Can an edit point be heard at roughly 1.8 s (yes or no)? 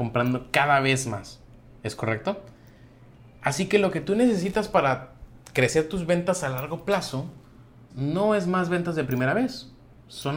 no